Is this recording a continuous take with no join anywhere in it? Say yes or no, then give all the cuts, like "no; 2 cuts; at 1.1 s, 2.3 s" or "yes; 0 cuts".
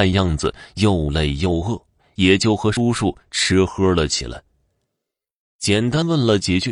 yes; 0 cuts